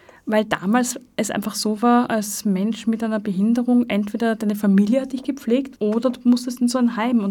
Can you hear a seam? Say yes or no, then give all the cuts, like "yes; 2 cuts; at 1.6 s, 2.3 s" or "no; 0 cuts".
yes; 2 cuts; at 2.1 s, 5.8 s